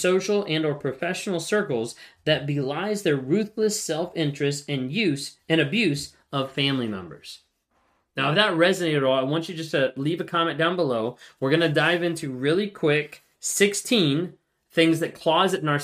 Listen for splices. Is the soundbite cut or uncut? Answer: uncut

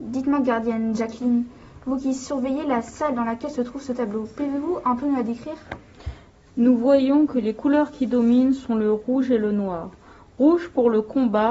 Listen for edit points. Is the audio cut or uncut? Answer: uncut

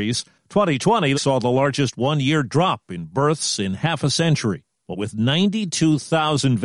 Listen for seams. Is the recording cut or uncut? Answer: cut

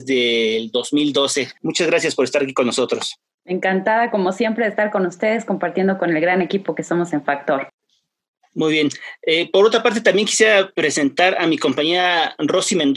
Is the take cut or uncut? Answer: cut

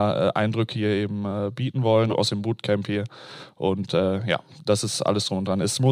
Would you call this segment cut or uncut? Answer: uncut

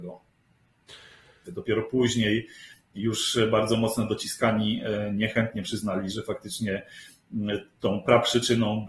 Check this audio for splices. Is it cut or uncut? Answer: cut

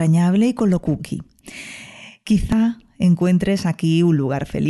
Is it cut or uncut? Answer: uncut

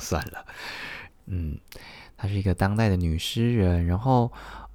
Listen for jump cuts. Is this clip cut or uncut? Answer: cut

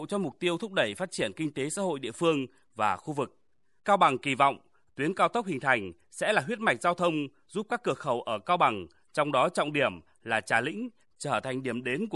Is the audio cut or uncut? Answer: cut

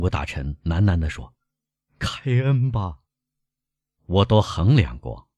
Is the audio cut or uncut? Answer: cut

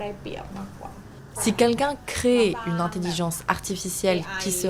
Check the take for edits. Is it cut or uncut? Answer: cut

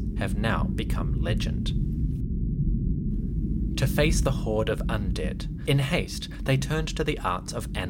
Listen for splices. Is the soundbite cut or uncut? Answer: cut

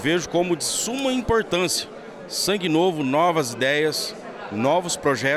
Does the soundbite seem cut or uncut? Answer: uncut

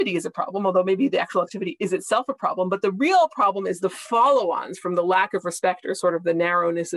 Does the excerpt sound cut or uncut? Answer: uncut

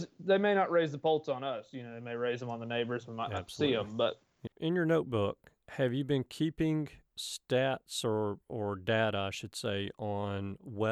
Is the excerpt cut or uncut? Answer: cut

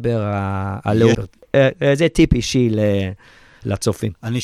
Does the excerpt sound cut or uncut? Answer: cut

